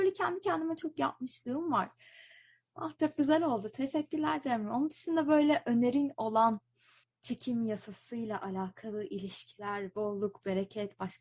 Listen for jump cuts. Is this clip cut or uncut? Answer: uncut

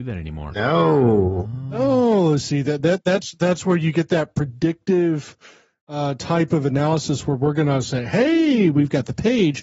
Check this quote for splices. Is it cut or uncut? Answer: uncut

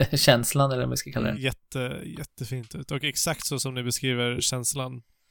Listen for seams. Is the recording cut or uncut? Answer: cut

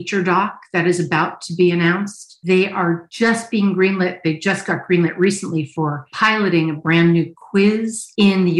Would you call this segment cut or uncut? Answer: uncut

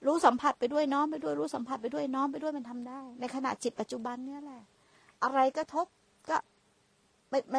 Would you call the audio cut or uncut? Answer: uncut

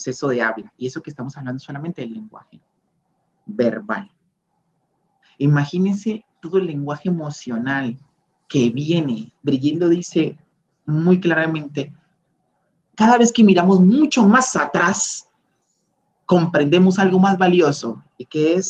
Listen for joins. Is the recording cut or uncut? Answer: uncut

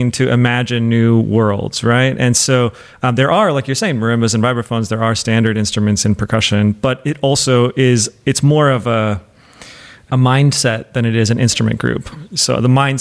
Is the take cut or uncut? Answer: uncut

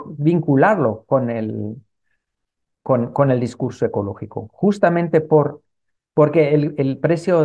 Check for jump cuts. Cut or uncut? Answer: uncut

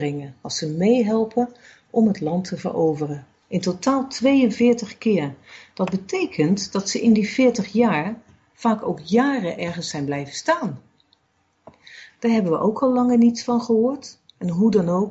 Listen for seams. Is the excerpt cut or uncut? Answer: cut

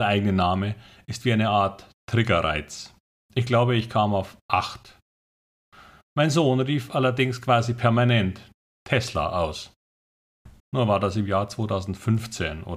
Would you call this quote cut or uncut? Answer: cut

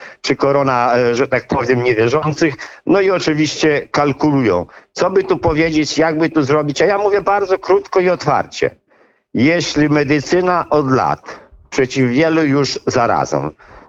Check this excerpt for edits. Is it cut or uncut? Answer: uncut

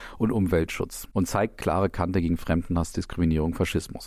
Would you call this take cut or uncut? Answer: uncut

